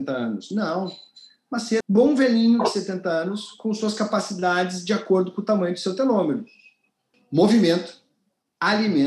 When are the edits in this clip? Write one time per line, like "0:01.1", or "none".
0:01.8
0:07.1